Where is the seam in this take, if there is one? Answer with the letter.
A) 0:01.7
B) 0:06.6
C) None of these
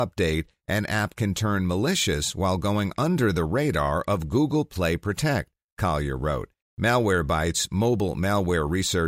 B